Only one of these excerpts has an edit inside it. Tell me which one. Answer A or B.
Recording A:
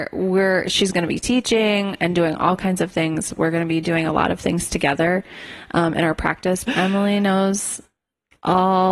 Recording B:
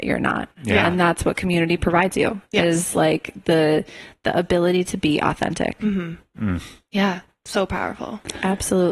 A